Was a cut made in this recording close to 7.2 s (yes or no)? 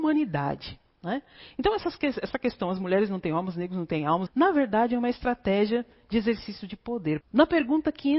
yes